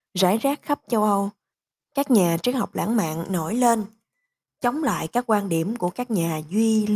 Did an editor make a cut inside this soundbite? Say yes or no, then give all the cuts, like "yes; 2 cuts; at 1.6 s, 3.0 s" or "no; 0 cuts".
no; 0 cuts